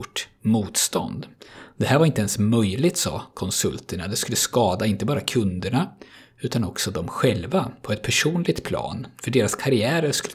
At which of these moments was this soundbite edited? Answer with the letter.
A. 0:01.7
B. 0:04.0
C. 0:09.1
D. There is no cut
D